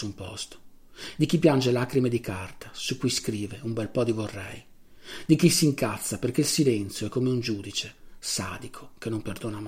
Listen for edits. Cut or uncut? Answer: uncut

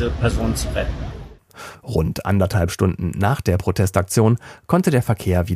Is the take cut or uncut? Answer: uncut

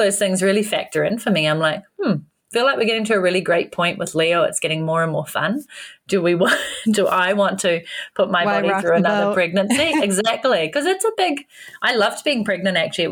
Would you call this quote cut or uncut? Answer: uncut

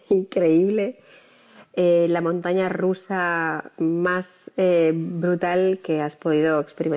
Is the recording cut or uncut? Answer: uncut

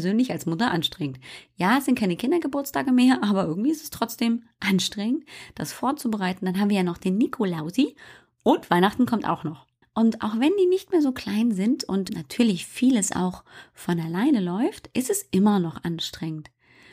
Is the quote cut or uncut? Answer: cut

